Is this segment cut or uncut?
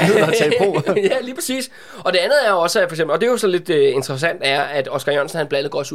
uncut